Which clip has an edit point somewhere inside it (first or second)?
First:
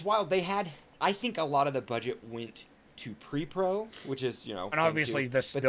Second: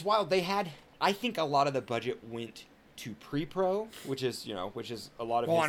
first